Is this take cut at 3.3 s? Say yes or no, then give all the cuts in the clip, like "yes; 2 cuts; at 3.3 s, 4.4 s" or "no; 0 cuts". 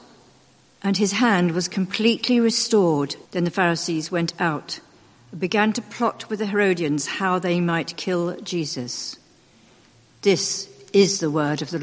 yes; 1 cut; at 3.3 s